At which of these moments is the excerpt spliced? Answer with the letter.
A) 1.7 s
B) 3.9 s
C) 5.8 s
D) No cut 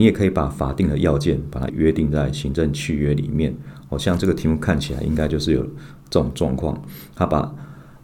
A